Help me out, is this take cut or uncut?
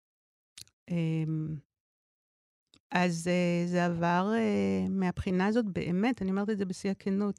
uncut